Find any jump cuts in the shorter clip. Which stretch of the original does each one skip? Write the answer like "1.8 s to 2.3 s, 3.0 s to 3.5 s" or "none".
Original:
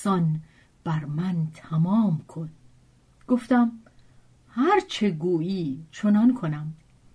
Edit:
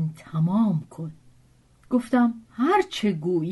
3.8 s to 4.4 s